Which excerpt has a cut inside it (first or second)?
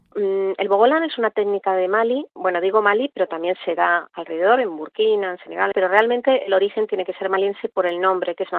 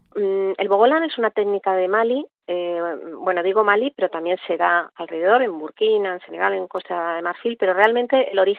first